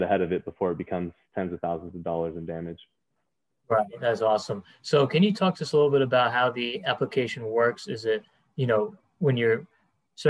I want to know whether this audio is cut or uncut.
uncut